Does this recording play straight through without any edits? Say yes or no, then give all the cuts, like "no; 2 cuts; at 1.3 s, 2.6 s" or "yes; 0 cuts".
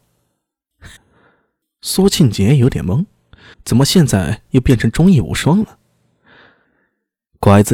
no; 3 cuts; at 1.0 s, 3.5 s, 6.6 s